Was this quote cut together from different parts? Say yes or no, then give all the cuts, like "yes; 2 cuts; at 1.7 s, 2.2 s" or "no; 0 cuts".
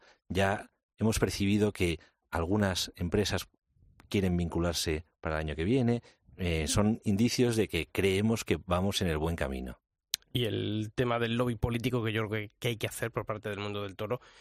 no; 0 cuts